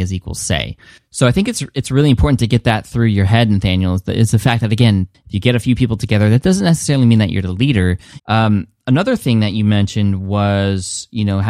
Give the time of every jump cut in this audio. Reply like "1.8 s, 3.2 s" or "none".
5.1 s, 8.2 s